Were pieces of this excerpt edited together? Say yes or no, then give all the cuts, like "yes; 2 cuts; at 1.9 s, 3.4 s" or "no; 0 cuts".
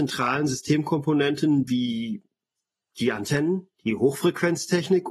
yes; 1 cut; at 3.7 s